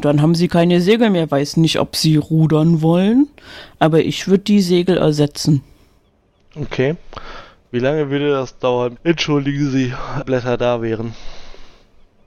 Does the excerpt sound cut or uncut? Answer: cut